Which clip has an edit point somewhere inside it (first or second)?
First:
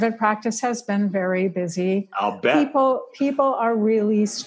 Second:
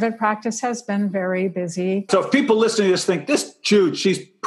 second